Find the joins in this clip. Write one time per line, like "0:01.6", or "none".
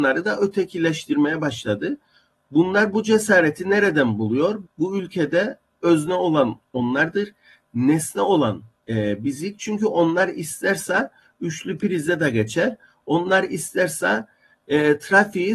0:04.6